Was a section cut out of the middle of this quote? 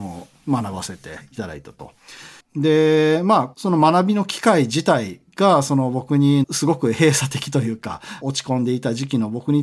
yes; 1 cut; at 2.4 s

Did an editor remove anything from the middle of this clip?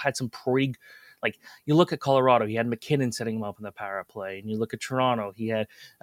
no; 0 cuts

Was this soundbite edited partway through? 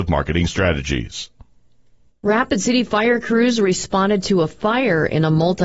yes; 1 cut; at 2.1 s

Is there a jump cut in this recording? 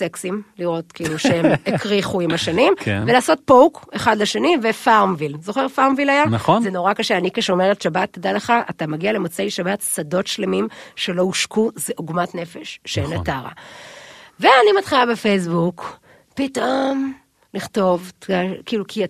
no; 0 cuts

